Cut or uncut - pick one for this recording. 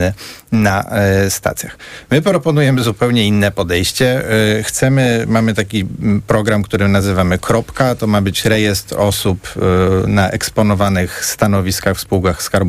uncut